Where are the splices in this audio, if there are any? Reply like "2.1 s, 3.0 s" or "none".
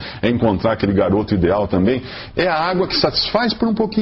2.3 s